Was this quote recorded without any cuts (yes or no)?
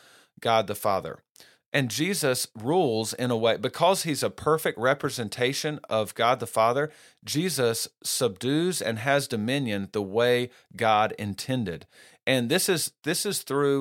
no